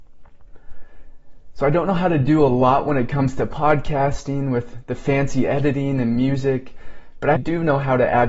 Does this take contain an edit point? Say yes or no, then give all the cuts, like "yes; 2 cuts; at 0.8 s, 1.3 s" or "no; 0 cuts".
yes; 1 cut; at 7.3 s